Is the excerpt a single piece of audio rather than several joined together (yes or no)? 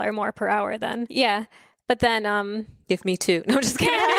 no